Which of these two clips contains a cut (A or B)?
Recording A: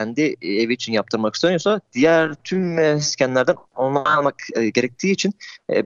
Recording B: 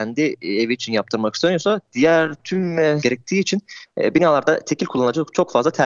B